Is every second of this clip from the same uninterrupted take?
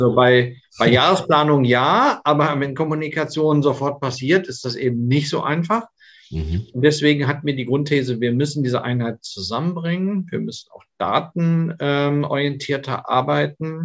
yes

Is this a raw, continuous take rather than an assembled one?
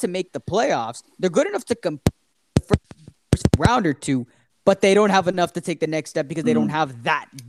yes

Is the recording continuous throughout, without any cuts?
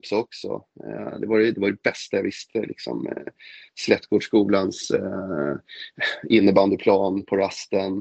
yes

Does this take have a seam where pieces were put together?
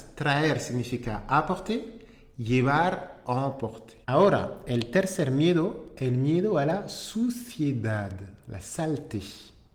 yes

